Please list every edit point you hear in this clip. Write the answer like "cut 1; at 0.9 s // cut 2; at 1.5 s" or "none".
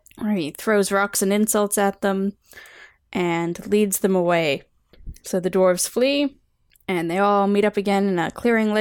none